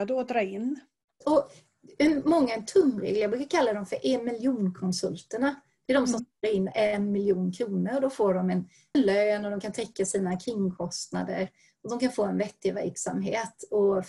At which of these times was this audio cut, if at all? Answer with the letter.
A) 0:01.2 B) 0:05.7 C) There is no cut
A